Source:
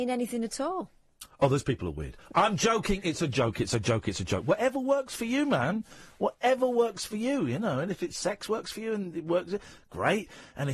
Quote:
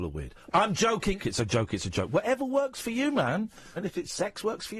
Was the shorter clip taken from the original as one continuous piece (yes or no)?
no